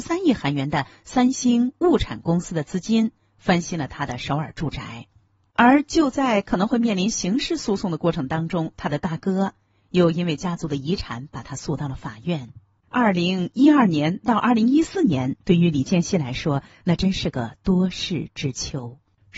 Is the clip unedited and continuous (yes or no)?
yes